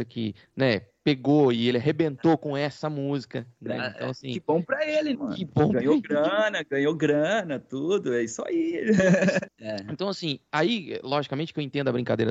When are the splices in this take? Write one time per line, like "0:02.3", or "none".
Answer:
0:05.1
0:09.5